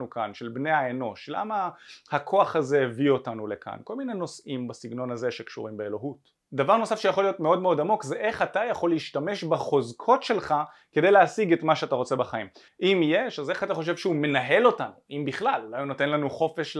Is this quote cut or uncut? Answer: cut